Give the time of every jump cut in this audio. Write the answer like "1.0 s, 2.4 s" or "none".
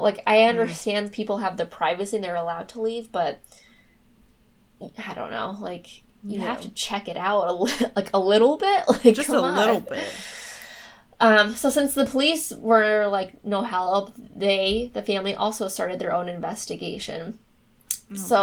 none